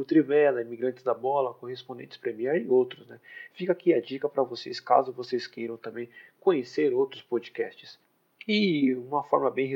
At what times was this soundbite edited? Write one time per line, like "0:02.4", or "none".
none